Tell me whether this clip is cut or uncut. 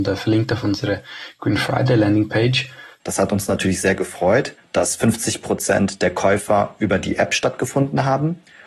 cut